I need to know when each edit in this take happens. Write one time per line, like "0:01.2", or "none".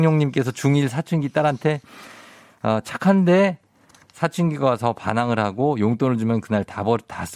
none